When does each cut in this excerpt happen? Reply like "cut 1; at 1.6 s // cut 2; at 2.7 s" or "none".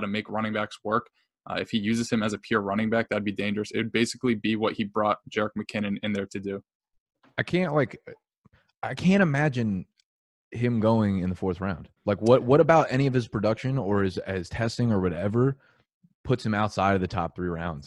cut 1; at 12.0 s

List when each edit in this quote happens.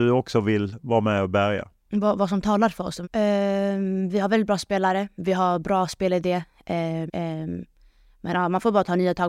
cut 1; at 3.0 s // cut 2; at 7.1 s

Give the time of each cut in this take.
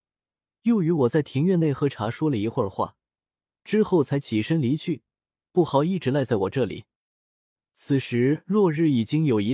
none

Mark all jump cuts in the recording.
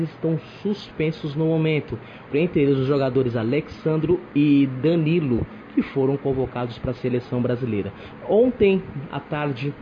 cut 1; at 2.3 s // cut 2; at 8.2 s

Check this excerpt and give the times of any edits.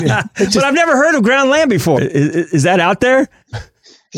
cut 1; at 2.0 s

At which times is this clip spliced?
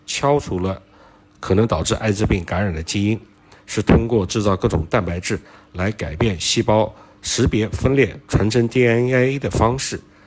cut 1; at 3.5 s

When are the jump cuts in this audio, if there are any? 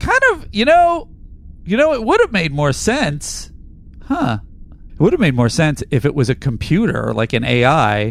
cut 1; at 4.9 s

